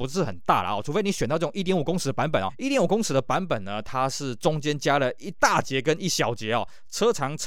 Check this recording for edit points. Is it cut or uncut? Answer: cut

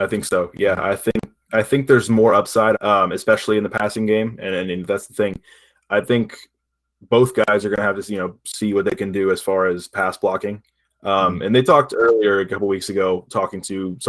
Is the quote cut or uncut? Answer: cut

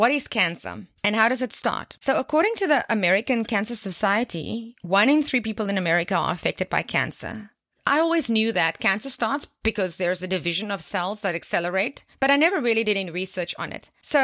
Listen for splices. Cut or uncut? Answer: uncut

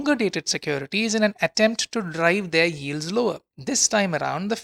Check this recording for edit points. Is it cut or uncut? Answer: uncut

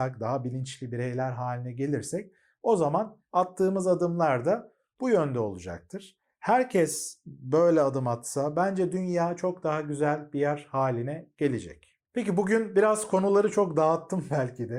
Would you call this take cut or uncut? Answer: uncut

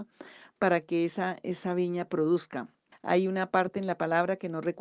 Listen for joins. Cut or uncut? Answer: cut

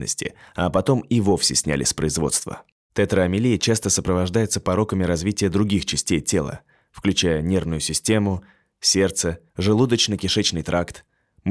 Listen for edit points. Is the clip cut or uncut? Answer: cut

